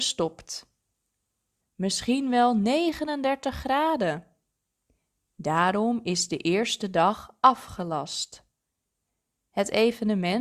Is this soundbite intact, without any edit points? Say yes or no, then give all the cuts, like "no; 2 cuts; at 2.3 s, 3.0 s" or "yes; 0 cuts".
no; 1 cut; at 1.6 s